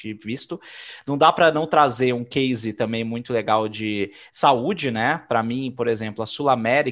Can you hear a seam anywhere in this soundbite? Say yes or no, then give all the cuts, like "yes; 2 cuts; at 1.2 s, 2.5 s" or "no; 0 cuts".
no; 0 cuts